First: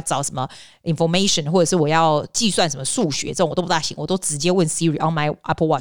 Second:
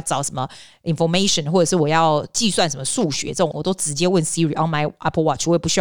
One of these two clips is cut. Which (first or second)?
second